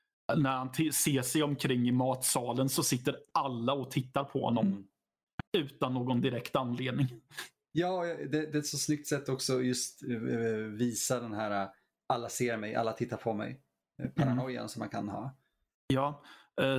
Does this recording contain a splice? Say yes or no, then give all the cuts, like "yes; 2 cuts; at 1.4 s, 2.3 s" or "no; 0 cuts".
no; 0 cuts